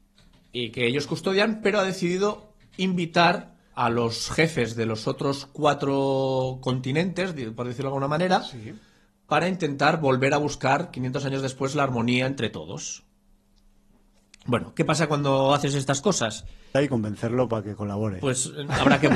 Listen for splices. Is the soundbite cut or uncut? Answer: cut